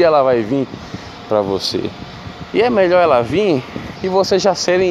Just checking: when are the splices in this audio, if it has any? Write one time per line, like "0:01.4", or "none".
none